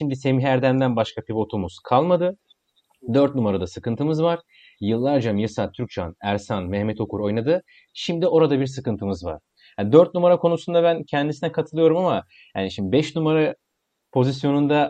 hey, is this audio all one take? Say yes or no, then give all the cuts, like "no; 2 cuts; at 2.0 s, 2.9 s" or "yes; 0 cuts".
yes; 0 cuts